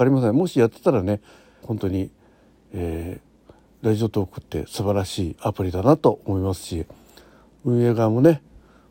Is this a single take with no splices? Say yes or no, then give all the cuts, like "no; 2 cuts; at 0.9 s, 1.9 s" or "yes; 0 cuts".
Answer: no; 1 cut; at 1.6 s